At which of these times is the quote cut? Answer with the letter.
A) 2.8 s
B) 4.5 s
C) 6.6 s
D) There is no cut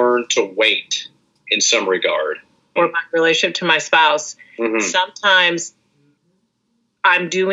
A